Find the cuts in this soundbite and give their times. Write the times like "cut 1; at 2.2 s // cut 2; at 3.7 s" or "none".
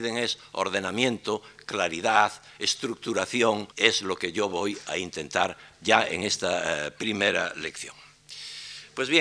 cut 1; at 3.7 s